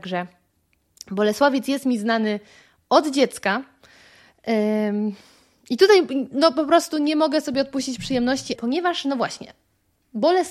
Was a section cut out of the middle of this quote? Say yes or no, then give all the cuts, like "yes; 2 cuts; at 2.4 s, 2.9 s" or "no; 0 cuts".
yes; 1 cut; at 8.6 s